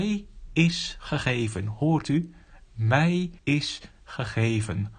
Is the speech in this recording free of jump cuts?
no; 1 cut; at 3.4 s

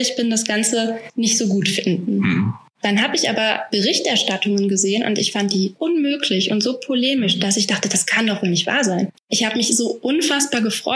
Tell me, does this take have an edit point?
yes; 1 cut; at 5.8 s

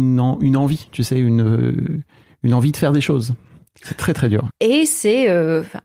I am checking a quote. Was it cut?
yes; 1 cut; at 4.5 s

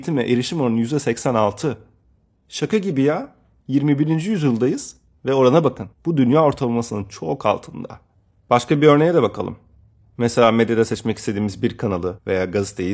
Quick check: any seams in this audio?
no; 0 cuts

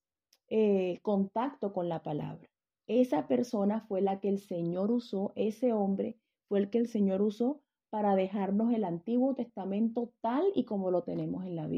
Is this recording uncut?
no; 1 cut; at 2.7 s

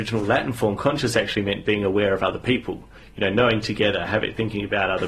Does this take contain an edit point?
no; 0 cuts

